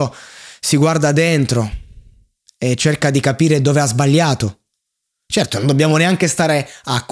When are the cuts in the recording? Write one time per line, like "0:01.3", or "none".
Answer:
0:05.3